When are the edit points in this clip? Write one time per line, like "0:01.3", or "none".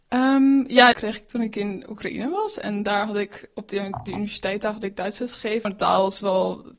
0:00.9
0:05.6